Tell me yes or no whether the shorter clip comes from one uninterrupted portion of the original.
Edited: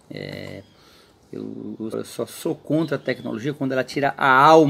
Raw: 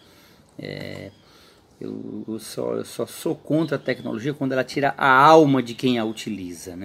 no